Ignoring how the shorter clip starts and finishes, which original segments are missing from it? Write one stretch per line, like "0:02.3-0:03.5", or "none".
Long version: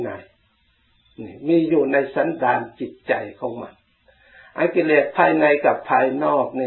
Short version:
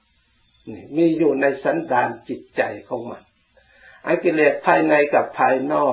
none